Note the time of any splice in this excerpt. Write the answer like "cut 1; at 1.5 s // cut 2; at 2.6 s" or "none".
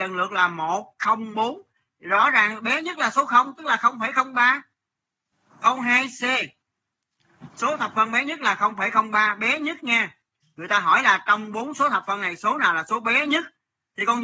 cut 1; at 1.3 s // cut 2; at 10.4 s